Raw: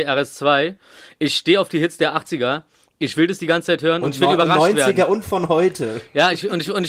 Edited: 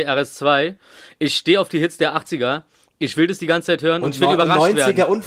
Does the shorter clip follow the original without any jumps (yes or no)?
yes